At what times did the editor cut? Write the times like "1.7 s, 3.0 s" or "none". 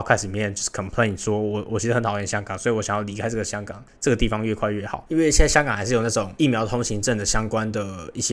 5.1 s